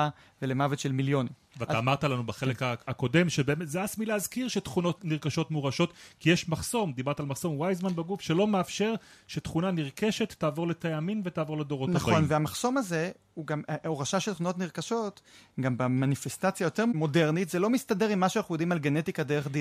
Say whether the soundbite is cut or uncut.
uncut